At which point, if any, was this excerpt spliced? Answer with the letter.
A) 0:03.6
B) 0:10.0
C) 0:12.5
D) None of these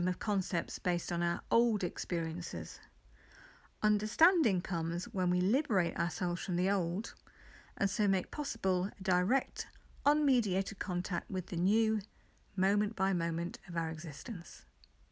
C